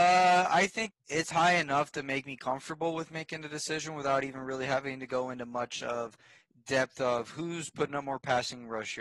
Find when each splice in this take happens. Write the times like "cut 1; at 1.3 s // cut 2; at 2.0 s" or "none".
cut 1; at 0.9 s